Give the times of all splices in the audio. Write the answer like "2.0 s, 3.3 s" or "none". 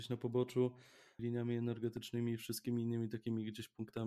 1.2 s